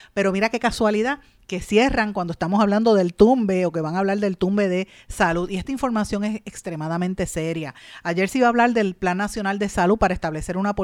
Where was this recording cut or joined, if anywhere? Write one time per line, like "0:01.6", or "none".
none